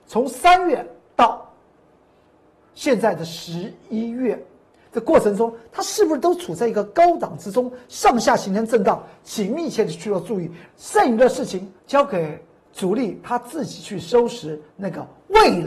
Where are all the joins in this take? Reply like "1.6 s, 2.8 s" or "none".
10.6 s, 11.8 s